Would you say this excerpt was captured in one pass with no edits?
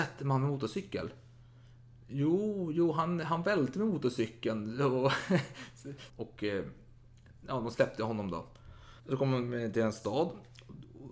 no; 2 cuts; at 6.1 s, 9.0 s

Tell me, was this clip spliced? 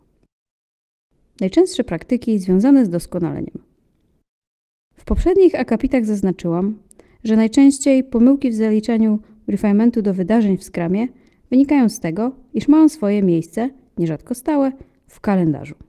no; 0 cuts

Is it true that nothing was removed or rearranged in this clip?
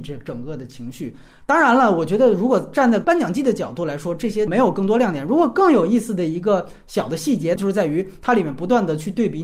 yes; 0 cuts

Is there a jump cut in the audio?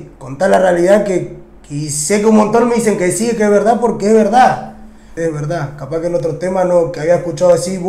yes; 1 cut; at 5.2 s

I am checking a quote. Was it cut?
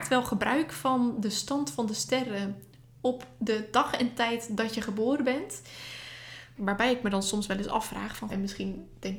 yes; 2 cuts; at 6.6 s, 8.3 s

